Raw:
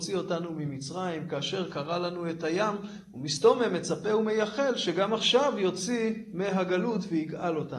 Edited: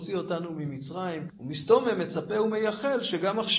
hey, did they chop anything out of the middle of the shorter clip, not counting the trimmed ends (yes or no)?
yes